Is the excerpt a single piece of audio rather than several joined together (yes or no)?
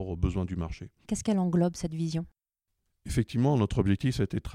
no